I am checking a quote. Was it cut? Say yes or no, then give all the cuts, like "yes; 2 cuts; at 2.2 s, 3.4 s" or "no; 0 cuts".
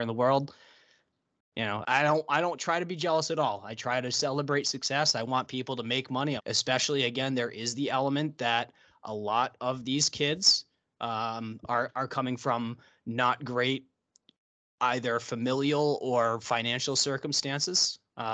yes; 3 cuts; at 1.8 s, 6.4 s, 11.6 s